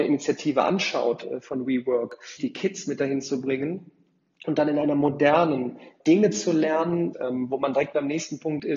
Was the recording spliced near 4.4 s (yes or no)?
no